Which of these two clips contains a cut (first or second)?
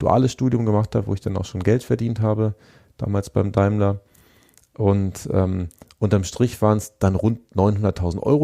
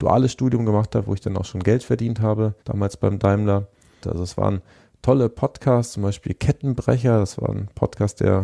second